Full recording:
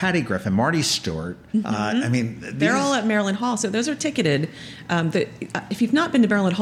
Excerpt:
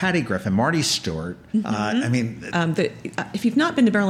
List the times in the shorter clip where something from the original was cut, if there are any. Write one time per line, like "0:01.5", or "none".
0:02.5